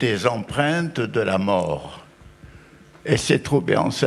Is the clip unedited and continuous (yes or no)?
no